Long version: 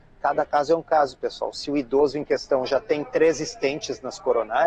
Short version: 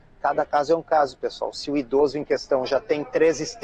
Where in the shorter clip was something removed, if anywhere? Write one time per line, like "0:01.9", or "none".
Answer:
none